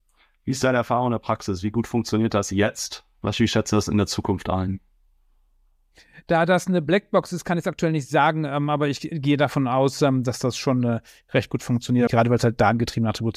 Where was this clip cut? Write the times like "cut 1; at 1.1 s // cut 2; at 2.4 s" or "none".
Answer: cut 1; at 12.1 s

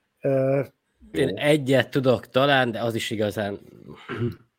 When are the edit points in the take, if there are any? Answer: cut 1; at 1.1 s

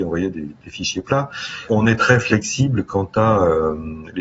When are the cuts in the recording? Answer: none

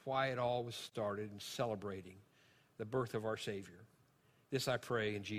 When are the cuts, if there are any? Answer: none

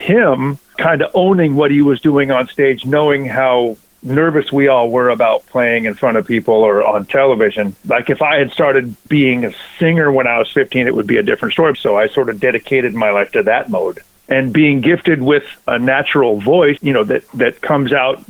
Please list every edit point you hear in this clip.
cut 1; at 11.7 s // cut 2; at 14.2 s // cut 3; at 16.8 s

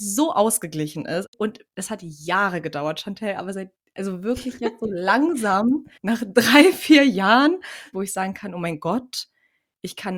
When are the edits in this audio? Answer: cut 1; at 6.0 s // cut 2; at 7.9 s

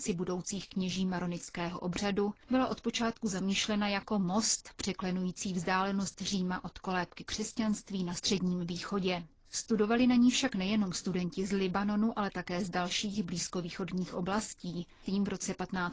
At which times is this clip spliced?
cut 1; at 15.0 s

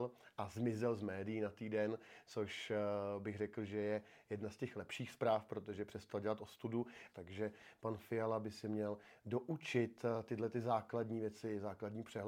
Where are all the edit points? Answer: cut 1; at 7.1 s

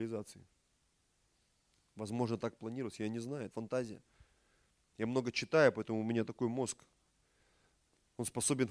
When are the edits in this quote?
cut 1; at 3.5 s

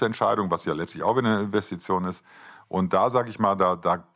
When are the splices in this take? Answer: none

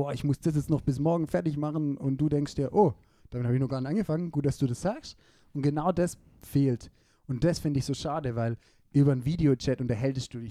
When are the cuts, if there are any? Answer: none

